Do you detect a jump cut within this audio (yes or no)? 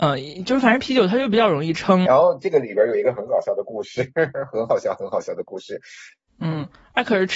yes